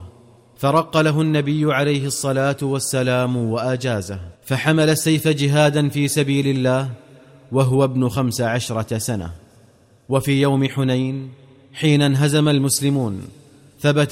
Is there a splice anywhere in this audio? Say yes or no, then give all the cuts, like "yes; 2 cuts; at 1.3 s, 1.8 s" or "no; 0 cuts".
yes; 1 cut; at 4.3 s